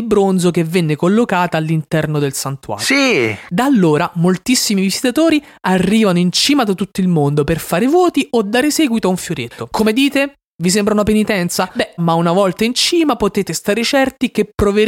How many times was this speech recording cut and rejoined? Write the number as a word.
one